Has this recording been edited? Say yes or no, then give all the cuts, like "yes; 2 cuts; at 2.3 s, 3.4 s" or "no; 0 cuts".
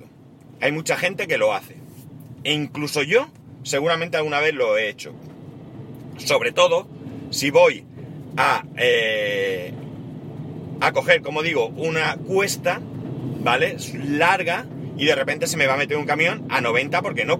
no; 0 cuts